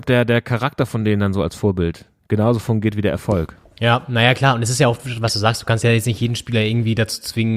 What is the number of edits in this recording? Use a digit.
0